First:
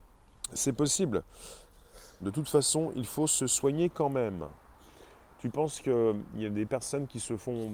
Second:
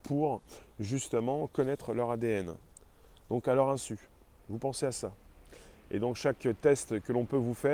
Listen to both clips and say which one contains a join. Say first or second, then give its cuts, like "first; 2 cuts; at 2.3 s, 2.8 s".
first; 1 cut; at 2.2 s